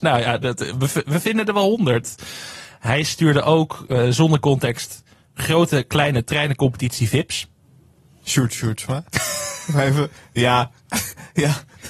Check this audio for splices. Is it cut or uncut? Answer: uncut